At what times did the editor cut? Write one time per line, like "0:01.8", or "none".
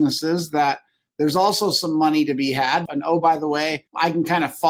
0:02.9